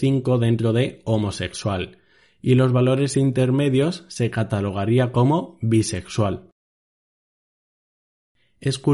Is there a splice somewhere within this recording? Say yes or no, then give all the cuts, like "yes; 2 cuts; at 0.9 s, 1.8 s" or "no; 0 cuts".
no; 0 cuts